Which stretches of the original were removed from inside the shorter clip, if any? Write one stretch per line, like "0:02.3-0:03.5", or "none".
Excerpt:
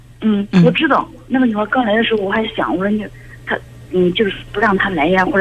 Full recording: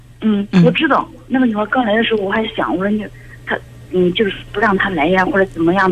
none